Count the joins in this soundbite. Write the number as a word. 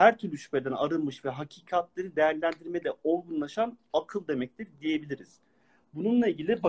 zero